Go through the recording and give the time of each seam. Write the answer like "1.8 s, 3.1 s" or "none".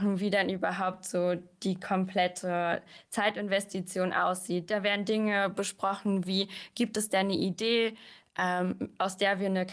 none